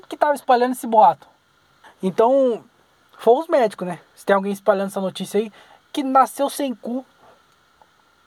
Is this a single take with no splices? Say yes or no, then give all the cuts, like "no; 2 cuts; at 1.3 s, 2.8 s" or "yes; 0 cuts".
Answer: no; 1 cut; at 1.8 s